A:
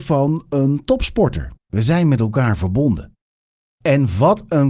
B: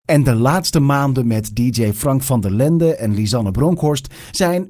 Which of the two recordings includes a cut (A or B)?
A